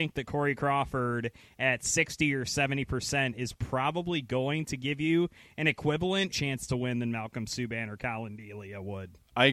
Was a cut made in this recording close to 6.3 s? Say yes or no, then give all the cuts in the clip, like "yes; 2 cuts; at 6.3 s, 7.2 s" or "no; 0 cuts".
yes; 1 cut; at 6.3 s